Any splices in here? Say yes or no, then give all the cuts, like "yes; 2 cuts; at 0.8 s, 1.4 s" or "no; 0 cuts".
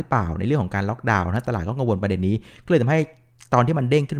no; 0 cuts